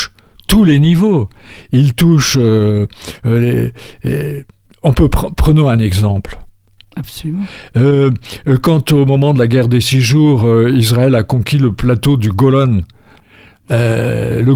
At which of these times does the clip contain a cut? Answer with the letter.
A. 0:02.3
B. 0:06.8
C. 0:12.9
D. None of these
B